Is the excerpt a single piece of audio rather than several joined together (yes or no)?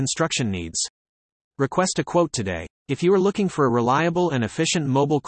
yes